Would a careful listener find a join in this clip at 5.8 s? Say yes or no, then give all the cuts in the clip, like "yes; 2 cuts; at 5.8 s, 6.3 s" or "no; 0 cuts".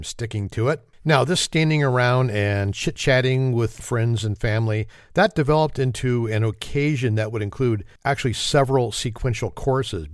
no; 3 cuts; at 0.9 s, 3.8 s, 8.0 s